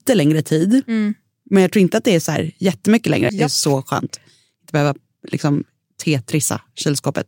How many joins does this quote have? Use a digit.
1